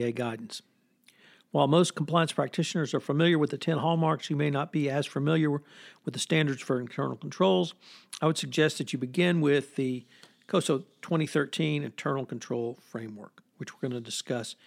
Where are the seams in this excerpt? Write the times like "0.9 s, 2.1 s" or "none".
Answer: none